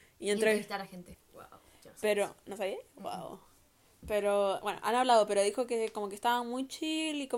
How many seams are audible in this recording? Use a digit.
1